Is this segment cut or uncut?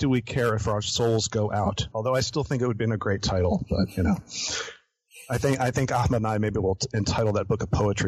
cut